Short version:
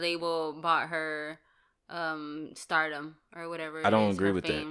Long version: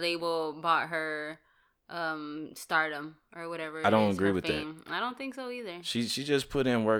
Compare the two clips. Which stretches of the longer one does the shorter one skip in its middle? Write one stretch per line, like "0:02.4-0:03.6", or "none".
none